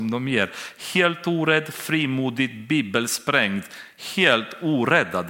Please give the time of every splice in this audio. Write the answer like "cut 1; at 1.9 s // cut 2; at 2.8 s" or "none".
none